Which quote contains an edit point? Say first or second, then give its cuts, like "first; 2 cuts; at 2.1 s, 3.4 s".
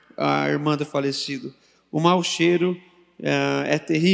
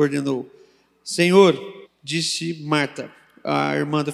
second; 1 cut; at 1.8 s